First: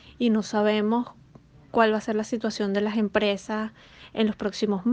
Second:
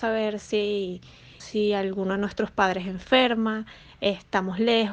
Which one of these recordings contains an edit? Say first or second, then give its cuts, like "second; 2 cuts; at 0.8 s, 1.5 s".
second; 1 cut; at 1.4 s